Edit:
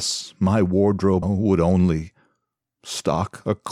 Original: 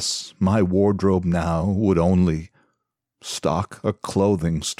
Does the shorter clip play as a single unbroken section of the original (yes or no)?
no